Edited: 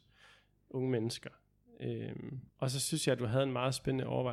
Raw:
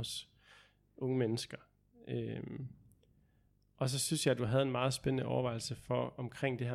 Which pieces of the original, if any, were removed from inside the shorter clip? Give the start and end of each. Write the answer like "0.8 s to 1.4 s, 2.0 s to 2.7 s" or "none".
2.8 s to 3.7 s